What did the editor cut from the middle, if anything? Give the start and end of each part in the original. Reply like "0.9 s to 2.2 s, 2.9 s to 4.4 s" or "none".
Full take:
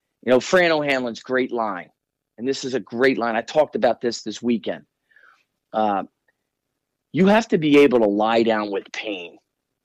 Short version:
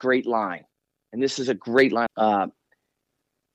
3.3 s to 5.6 s

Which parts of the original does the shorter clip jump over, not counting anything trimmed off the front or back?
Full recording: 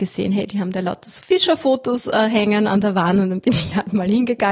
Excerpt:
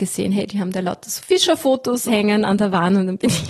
2.1 s to 2.3 s

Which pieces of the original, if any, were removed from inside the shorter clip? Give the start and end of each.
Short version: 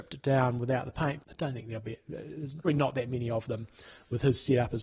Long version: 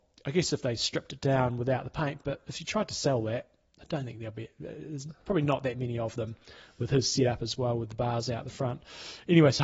2.2 s to 3.7 s, 5.2 s to 5.3 s

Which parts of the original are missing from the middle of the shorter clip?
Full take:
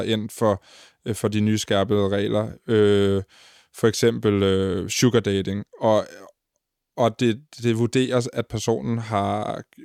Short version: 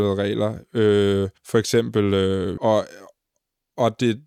3.3 s to 3.7 s, 4.9 s to 5.8 s

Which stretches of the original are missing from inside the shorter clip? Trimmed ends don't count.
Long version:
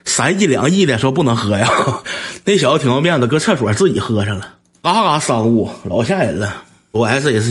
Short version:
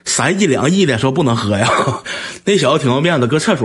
none

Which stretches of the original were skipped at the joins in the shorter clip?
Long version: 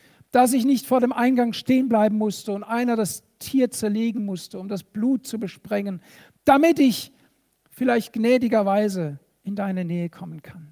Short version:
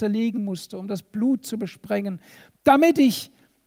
none

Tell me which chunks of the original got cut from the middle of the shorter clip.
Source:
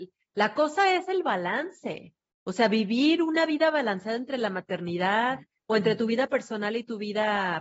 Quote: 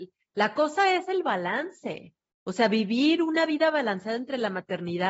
none

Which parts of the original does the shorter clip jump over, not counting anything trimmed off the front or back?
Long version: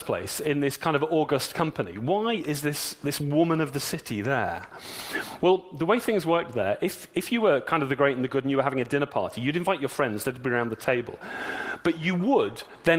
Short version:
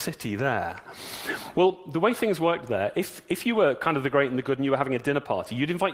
none

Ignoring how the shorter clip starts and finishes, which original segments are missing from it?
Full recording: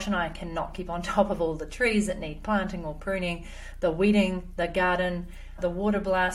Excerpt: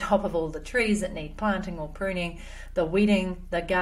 none

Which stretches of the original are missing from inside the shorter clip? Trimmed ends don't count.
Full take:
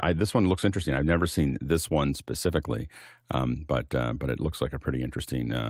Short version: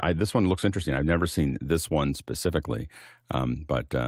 none

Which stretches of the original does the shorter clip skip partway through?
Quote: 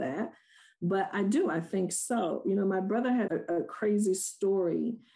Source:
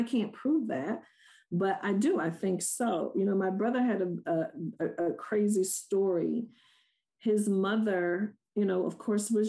4.0 s to 4.8 s

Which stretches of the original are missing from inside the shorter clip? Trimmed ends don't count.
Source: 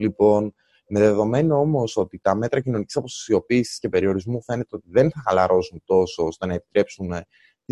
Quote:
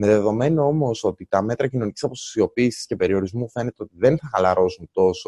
none

